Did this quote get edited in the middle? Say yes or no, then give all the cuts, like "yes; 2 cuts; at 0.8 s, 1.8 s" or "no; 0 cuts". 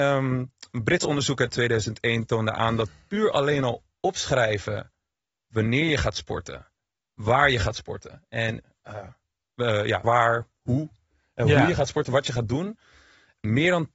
yes; 1 cut; at 10.0 s